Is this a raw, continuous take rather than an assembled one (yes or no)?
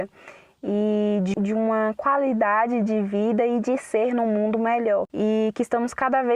no